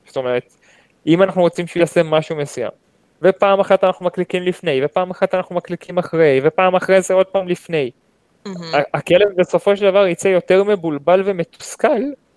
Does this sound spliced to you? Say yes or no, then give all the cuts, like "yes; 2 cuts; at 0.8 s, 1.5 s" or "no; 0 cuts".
no; 0 cuts